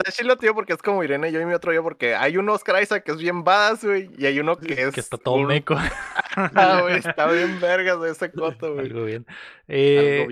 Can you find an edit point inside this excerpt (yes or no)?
no